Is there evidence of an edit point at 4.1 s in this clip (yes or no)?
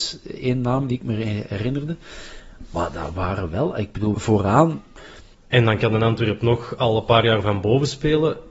yes